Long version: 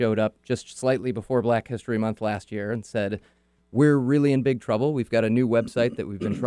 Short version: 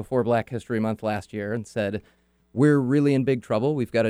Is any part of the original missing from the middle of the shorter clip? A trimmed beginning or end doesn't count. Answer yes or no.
no